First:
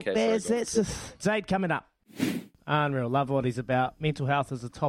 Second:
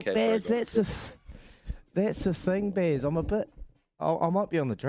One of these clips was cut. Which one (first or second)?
first